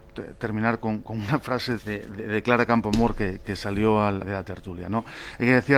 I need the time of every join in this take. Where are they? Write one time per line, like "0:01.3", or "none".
0:01.8
0:04.2

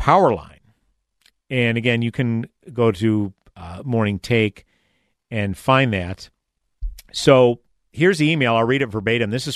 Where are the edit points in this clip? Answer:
none

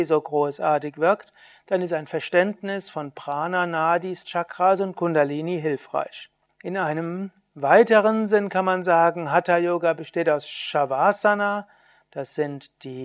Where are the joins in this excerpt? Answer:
0:06.5

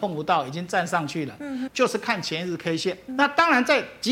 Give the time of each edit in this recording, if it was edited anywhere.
0:01.7
0:03.1

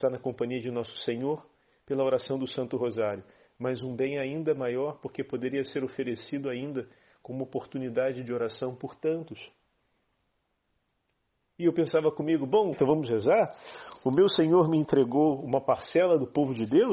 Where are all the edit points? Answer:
0:12.7

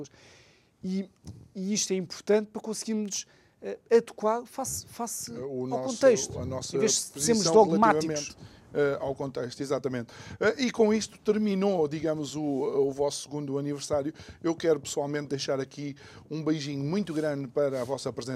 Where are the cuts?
none

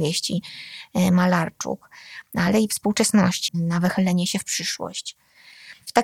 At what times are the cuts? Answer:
0:03.5

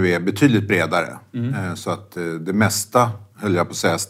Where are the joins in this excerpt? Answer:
none

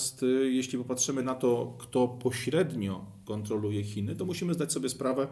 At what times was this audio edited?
none

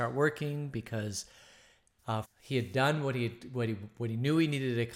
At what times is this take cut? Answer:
0:02.2

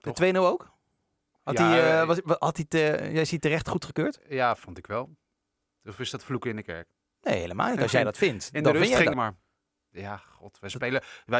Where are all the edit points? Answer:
0:09.1

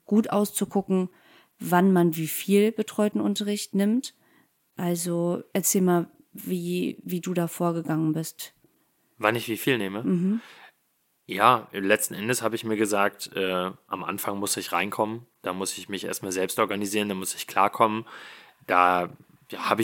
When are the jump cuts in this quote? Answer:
none

